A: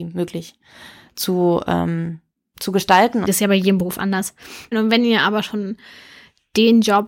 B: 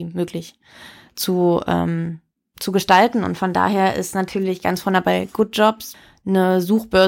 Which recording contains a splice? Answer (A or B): A